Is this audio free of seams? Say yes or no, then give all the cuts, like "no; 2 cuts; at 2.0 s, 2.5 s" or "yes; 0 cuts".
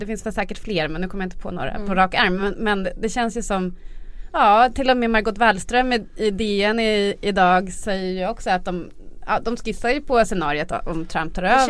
yes; 0 cuts